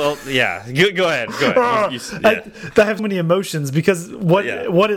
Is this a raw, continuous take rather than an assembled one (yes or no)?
no